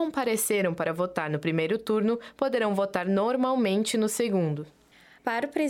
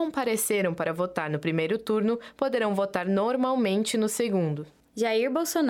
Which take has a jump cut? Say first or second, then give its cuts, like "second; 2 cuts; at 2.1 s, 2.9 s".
second; 1 cut; at 4.8 s